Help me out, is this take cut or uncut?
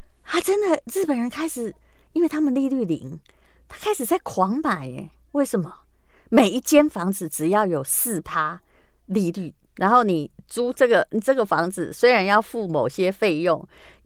uncut